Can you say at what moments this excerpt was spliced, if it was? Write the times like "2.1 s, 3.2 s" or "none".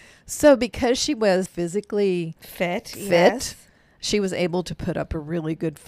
1.5 s